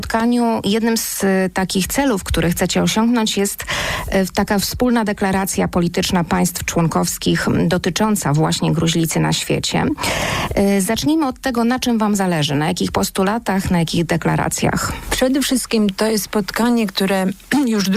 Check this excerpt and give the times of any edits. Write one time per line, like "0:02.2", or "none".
none

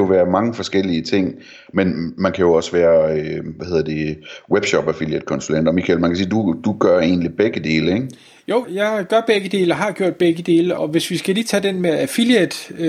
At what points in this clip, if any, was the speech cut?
0:01.7
0:08.6
0:10.8

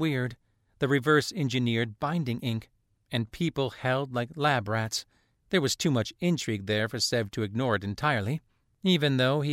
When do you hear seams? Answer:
none

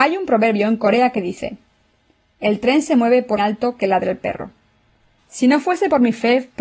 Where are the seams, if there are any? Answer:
0:03.4
0:05.2

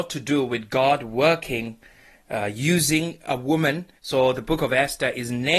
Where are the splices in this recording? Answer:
0:04.0

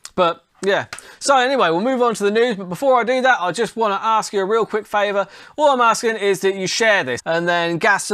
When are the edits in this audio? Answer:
0:07.2

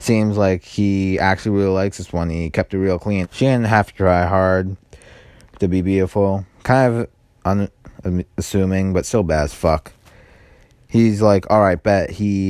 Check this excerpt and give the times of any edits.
0:03.2

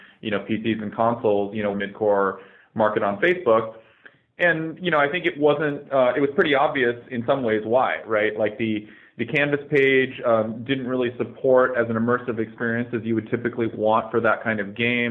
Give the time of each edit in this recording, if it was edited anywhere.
0:01.7

